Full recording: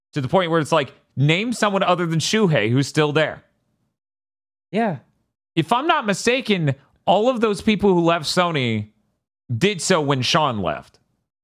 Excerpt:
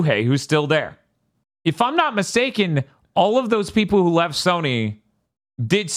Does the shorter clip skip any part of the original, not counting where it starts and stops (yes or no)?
yes